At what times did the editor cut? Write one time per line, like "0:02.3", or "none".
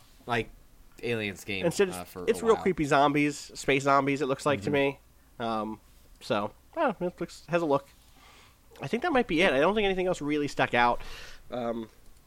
none